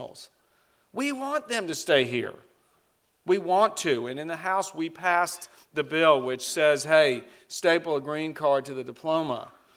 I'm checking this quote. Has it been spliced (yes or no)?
no